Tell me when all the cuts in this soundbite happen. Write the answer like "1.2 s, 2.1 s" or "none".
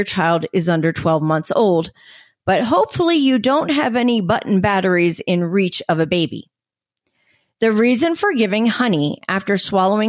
none

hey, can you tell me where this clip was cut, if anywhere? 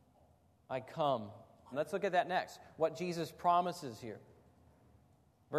1.7 s

